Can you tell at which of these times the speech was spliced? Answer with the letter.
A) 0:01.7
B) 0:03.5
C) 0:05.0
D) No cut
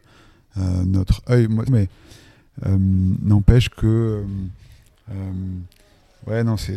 A